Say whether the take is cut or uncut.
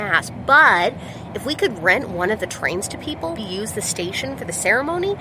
cut